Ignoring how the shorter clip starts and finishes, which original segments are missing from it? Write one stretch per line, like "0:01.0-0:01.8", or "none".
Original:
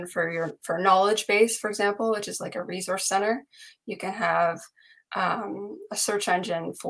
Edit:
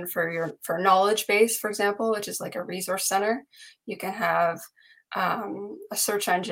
none